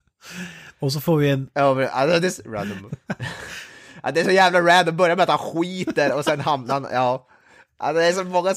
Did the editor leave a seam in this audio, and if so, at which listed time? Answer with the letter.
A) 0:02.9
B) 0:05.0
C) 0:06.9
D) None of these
A